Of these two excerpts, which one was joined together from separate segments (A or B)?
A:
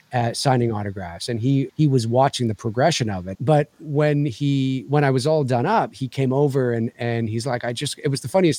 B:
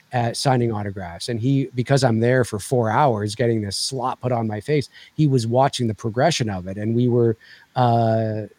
A